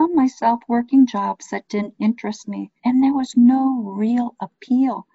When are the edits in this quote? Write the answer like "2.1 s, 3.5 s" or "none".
2.8 s